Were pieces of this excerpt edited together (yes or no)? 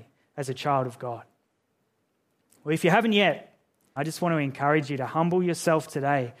yes